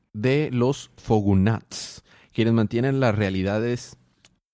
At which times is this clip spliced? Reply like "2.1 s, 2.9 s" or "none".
1.0 s